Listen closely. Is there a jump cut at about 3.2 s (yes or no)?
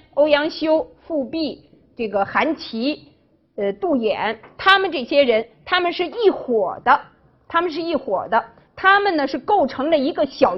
no